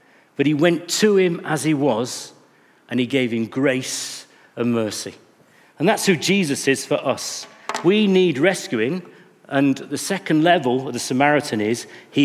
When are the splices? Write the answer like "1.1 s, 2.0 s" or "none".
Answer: none